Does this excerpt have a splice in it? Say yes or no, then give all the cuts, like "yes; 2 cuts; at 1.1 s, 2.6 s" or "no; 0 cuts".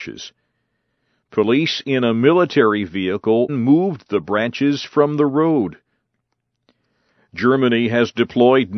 yes; 1 cut; at 3.5 s